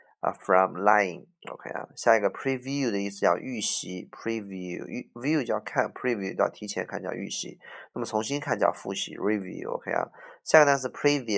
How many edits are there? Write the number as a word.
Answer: zero